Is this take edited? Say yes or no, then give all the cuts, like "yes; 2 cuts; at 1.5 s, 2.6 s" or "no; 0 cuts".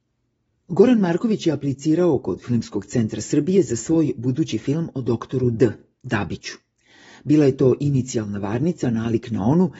no; 0 cuts